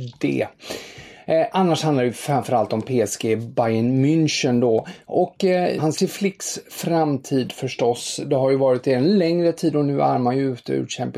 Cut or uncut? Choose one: cut